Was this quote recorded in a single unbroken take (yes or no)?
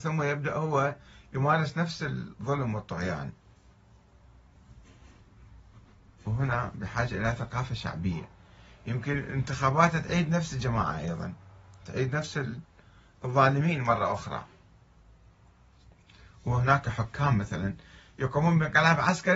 yes